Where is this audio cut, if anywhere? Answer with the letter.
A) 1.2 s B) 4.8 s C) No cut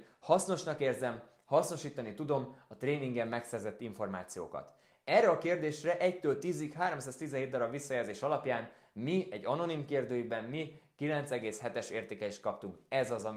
C